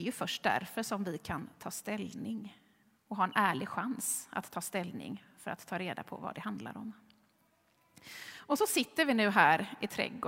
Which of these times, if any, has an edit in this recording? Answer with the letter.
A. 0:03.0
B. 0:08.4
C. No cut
C